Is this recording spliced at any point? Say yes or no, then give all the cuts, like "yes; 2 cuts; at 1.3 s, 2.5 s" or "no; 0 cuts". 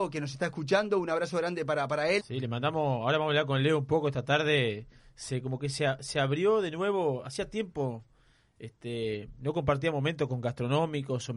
yes; 1 cut; at 2.2 s